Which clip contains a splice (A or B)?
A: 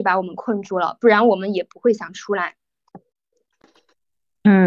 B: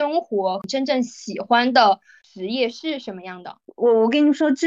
B